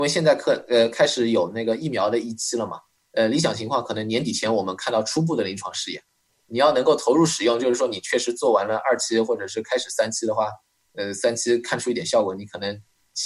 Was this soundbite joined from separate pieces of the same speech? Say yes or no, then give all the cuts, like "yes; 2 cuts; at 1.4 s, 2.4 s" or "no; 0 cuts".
no; 0 cuts